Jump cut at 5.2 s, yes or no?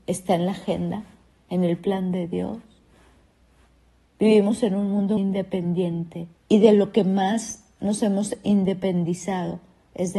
yes